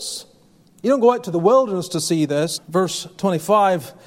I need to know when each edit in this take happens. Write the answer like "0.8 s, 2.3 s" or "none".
2.6 s